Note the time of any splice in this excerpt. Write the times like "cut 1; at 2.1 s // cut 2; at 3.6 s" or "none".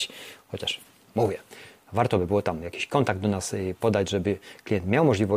none